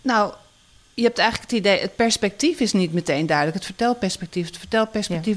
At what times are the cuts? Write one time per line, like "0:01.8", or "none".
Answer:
none

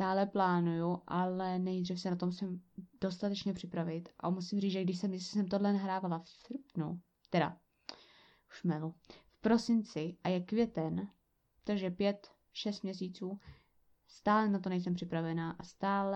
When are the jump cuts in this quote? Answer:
none

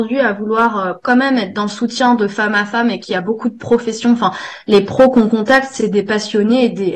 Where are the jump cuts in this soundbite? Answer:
0:05.8

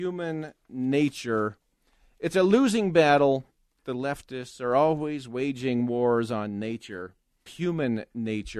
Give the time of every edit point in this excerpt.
0:07.5

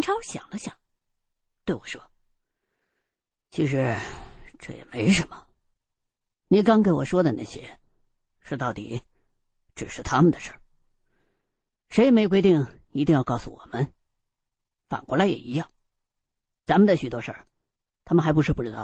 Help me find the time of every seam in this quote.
none

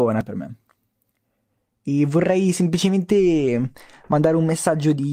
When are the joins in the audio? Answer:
none

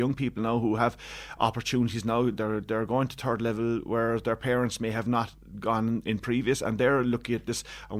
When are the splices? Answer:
none

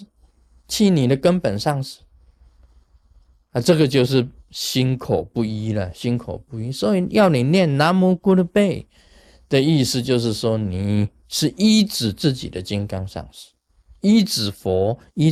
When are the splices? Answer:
none

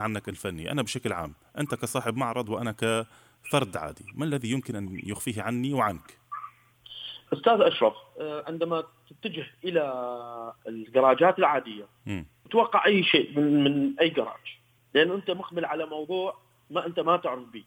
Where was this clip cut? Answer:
none

